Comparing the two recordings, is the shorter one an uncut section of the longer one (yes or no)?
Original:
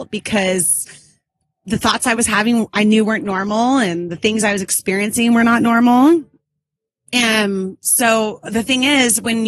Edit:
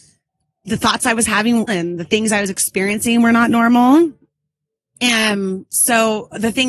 no